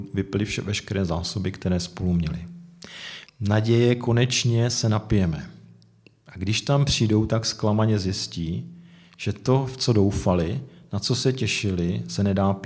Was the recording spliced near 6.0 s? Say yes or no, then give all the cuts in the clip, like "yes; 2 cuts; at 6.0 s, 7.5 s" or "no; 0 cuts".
no; 1 cut; at 3.2 s